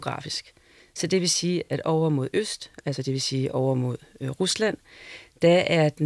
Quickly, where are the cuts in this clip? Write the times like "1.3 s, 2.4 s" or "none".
none